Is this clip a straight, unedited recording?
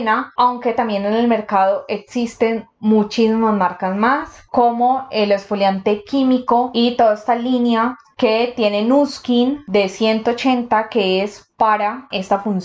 yes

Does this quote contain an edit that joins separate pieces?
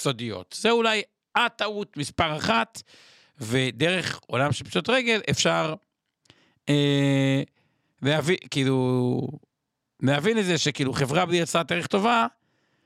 no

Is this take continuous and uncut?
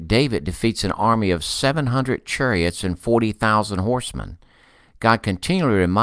yes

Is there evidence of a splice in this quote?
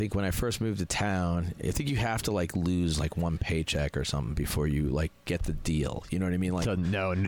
no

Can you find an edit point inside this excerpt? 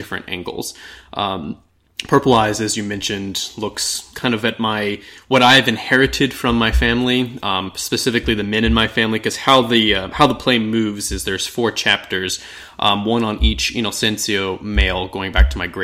no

